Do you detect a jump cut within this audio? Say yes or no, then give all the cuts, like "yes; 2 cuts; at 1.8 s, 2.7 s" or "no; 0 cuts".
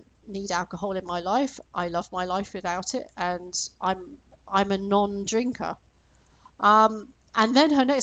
no; 0 cuts